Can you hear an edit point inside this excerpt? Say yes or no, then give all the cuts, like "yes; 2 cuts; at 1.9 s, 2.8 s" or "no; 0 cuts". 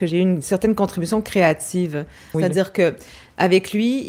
yes; 1 cut; at 2.3 s